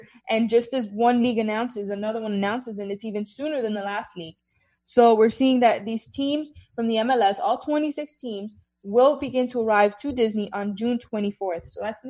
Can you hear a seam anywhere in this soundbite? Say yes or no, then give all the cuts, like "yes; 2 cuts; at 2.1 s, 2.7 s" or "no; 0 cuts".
no; 0 cuts